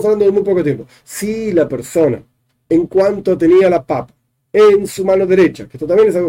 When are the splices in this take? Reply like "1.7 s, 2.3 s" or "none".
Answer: 1.0 s